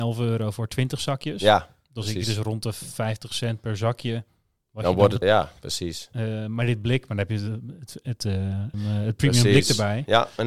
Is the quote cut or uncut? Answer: cut